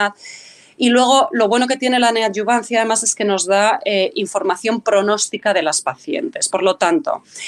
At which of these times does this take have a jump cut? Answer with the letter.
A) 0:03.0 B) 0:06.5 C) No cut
C